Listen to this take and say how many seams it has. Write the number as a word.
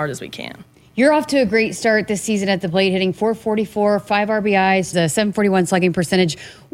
one